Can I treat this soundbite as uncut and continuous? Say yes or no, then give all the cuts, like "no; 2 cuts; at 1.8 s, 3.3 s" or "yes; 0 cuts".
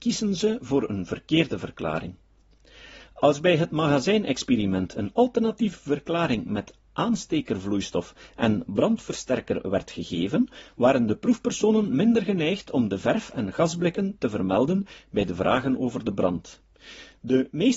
yes; 0 cuts